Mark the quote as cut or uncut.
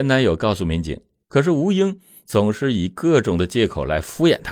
cut